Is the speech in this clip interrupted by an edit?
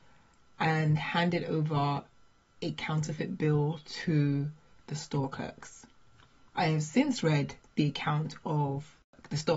yes; 1 cut; at 6.5 s

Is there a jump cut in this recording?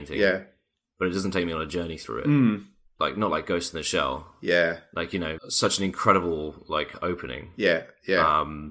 yes; 1 cut; at 5.4 s

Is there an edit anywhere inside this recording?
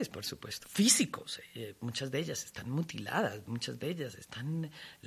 no; 0 cuts

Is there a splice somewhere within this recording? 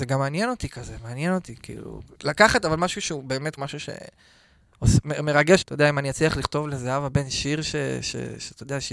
yes; 2 cuts; at 3.6 s, 5.6 s

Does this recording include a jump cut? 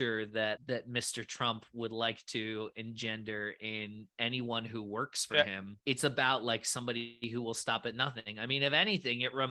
yes; 1 cut; at 5.8 s

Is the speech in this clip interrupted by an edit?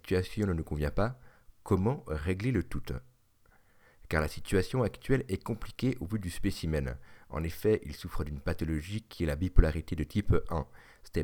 no; 0 cuts

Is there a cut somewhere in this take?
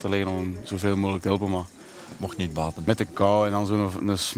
no; 0 cuts

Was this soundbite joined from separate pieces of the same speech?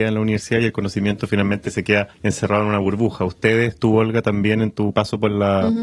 no; 0 cuts

